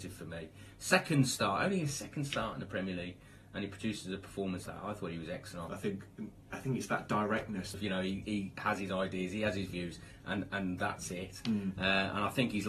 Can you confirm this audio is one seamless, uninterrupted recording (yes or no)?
no